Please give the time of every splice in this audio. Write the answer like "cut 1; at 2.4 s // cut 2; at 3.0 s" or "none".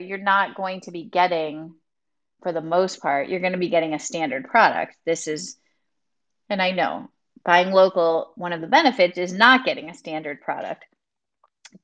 cut 1; at 2.4 s